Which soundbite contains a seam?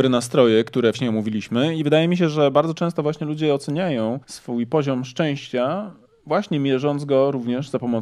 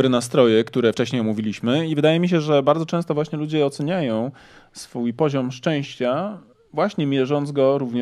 first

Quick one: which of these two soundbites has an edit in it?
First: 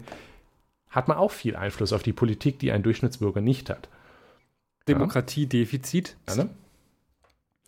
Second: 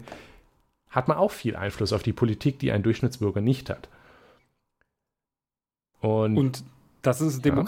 first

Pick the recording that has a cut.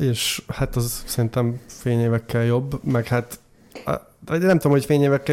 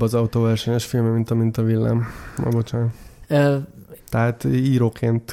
second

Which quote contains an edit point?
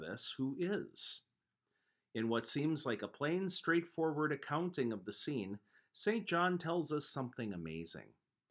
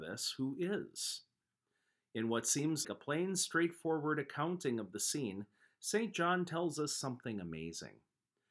second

